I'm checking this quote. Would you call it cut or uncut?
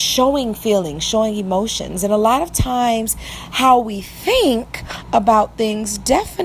uncut